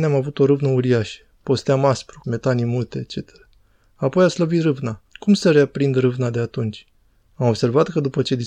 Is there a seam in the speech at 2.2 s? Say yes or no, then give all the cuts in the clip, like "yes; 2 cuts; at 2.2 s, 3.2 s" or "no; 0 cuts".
yes; 2 cuts; at 2.2 s, 5.1 s